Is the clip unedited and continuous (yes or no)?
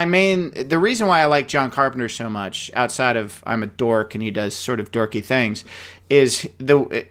yes